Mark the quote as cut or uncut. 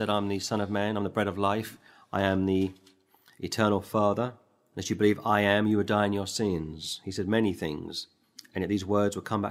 uncut